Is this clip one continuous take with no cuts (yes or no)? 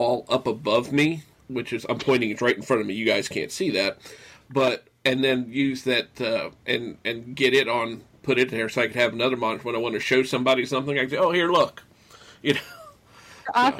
yes